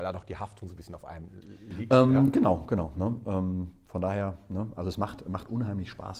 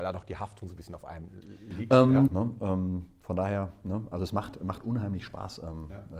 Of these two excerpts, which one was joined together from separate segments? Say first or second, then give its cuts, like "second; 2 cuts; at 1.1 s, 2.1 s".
second; 1 cut; at 2.3 s